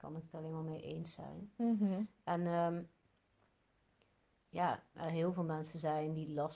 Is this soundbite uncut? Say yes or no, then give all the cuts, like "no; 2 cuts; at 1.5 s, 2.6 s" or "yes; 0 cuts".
no; 1 cut; at 4.9 s